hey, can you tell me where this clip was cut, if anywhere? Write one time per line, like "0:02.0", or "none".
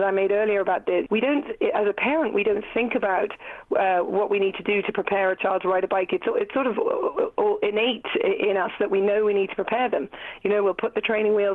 0:01.1